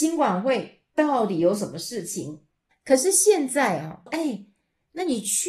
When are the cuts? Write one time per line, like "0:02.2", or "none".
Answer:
0:02.7
0:04.1